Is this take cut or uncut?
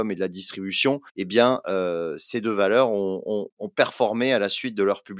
cut